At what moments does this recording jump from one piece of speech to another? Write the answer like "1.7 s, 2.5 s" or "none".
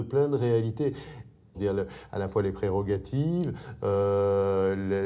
1.5 s